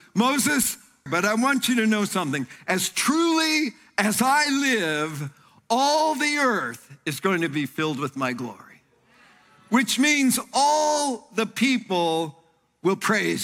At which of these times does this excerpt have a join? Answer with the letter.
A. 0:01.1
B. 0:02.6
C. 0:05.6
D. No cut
A